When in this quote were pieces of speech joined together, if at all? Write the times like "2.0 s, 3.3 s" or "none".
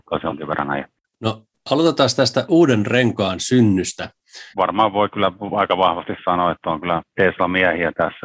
4.5 s